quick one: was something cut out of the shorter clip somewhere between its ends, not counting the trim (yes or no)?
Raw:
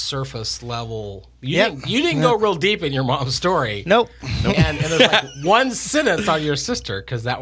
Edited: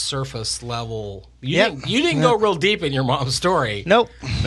no